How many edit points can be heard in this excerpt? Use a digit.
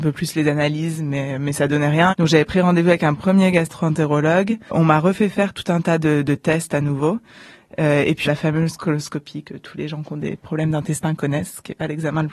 2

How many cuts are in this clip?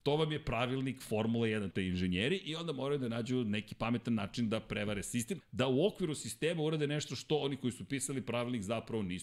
2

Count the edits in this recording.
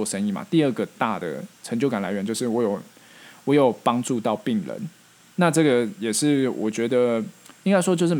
0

